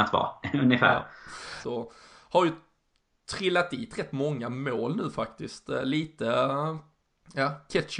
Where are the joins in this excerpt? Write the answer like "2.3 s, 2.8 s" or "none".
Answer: 1.6 s